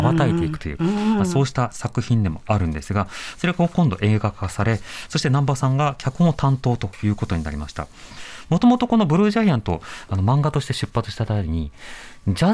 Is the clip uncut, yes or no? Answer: yes